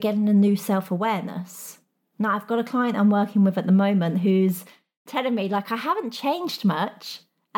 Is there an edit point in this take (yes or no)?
no